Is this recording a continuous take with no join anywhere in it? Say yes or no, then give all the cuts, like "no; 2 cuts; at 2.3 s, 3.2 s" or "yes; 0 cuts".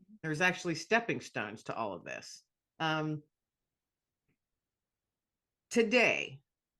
no; 1 cut; at 2.7 s